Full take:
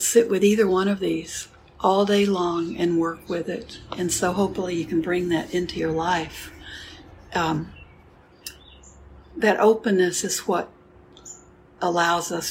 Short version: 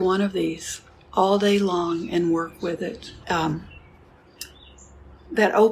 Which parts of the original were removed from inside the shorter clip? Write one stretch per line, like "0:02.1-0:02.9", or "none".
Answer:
0:03.9-0:07.3